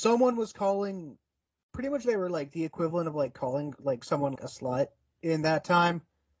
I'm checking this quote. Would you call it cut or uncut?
cut